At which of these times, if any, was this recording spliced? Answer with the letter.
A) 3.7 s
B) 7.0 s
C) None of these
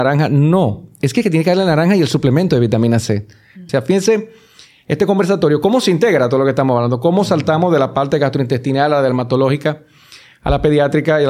A